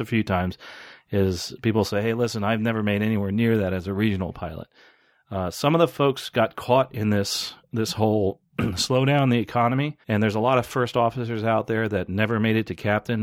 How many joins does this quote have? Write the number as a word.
one